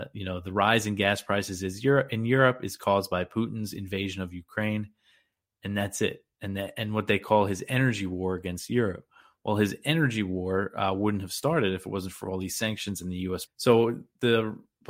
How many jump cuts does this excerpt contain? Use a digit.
1